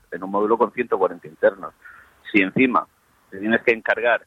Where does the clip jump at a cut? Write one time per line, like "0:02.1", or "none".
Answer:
none